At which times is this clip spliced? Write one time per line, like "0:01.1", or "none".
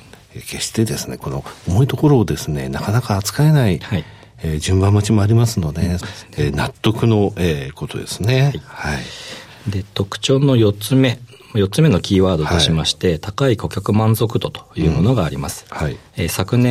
0:06.0